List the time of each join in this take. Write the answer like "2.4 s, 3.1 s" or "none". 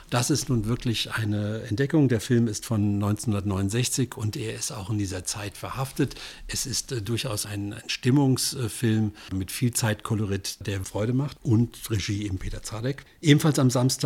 7.4 s, 10.8 s

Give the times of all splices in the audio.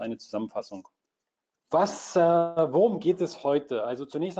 1.6 s

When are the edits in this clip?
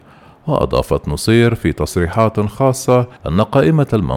3.2 s

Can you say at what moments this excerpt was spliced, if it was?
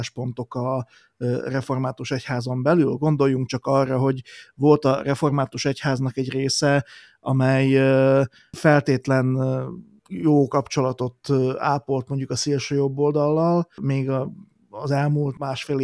none

